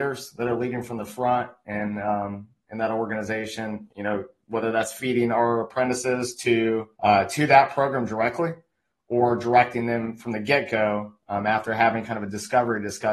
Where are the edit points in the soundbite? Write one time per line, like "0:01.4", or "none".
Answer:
0:03.9
0:06.9

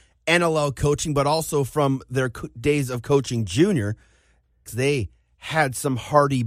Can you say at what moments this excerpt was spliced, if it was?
0:04.7

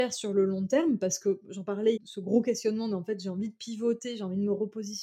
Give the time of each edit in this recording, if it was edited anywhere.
0:02.0

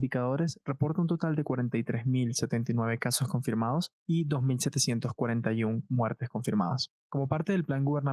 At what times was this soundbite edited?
0:04.0

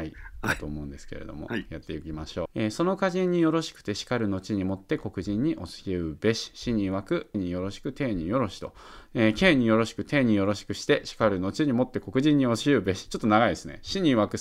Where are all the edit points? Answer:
0:02.5
0:07.3

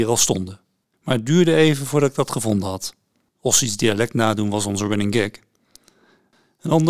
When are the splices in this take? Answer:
0:00.9
0:03.3

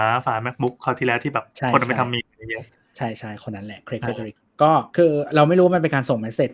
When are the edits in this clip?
0:04.9

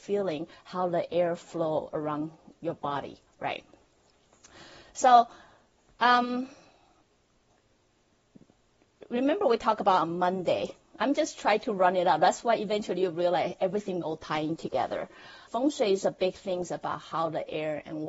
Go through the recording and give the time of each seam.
0:14.0
0:15.5

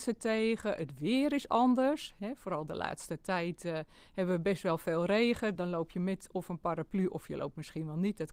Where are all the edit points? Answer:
0:05.5

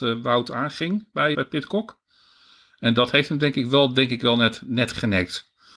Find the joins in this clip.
0:01.3

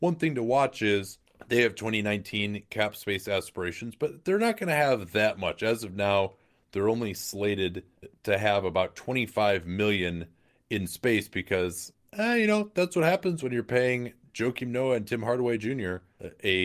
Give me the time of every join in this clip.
none

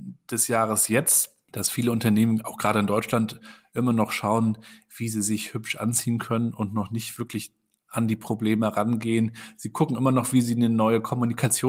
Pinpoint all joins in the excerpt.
none

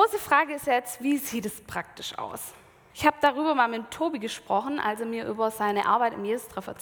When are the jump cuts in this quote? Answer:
0:02.9

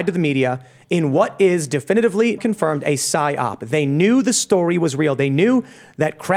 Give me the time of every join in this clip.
0:02.4

